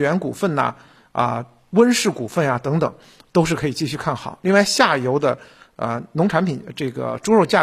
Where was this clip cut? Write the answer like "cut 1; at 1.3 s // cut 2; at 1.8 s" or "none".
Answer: none